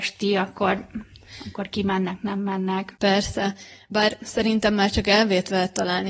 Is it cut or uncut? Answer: uncut